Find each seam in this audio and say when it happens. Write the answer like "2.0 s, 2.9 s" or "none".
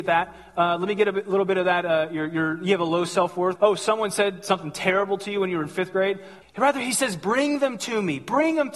3.6 s, 6.4 s